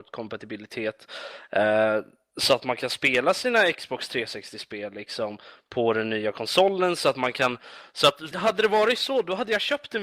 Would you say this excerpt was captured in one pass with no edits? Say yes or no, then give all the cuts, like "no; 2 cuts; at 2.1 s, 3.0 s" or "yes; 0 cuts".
no; 1 cut; at 8.3 s